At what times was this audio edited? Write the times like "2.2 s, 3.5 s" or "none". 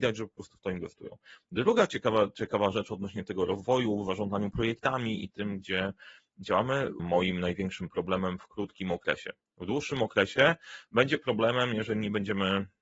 5.3 s, 7.0 s